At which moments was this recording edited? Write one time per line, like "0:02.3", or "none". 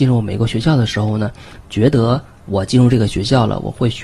0:01.6